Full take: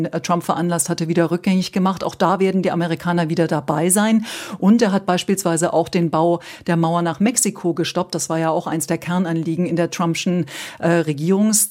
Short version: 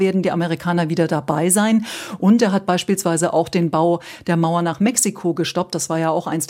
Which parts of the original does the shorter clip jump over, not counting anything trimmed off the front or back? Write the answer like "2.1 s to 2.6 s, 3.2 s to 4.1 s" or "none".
none